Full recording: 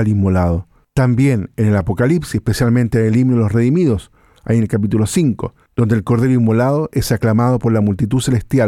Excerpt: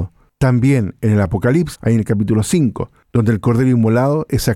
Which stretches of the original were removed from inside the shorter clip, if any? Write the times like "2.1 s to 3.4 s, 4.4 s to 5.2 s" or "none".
2.3 s to 4.4 s